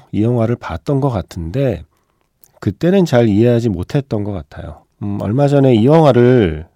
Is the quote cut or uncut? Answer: cut